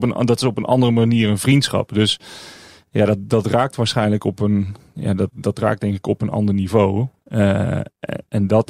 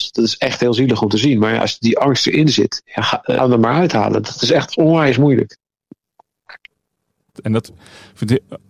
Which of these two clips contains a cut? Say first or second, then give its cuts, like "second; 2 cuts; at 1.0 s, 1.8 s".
second; 2 cuts; at 3.4 s, 7.3 s